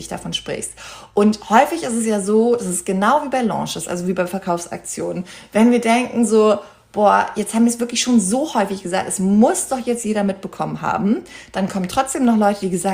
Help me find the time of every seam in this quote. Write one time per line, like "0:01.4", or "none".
none